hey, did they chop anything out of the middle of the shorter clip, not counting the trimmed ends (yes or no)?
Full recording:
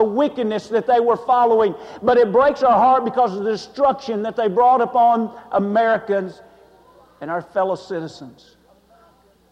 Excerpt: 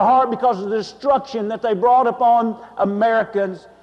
no